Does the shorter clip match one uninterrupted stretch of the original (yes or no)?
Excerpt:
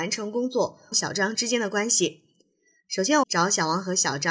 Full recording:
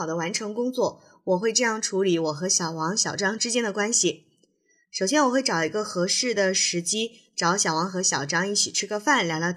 no